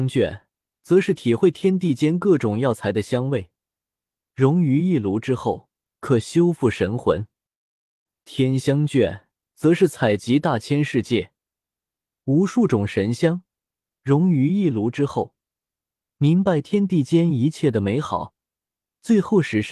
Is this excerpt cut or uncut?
uncut